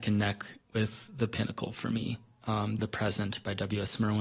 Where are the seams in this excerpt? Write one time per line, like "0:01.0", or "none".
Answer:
0:02.8